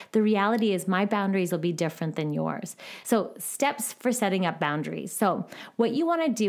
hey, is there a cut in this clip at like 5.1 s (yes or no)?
no